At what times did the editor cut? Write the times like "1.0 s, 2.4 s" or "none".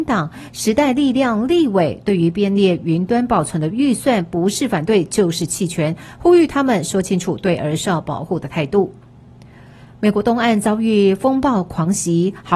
none